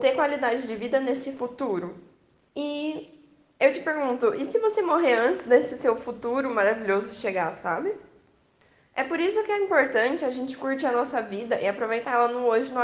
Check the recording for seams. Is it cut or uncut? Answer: cut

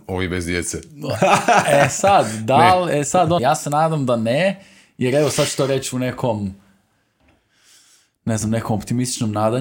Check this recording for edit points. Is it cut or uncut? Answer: cut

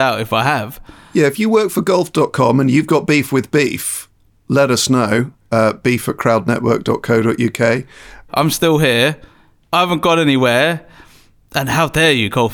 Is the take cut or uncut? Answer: cut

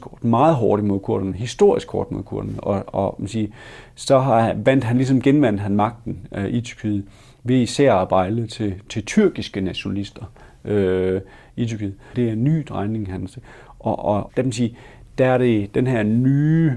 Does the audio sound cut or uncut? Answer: cut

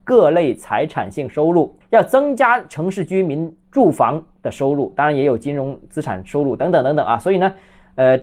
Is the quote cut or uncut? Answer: cut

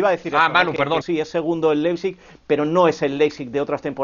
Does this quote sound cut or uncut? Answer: cut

